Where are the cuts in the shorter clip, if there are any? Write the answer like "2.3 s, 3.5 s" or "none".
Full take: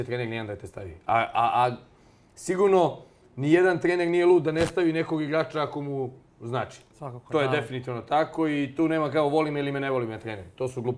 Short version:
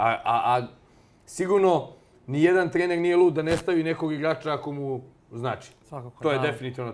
none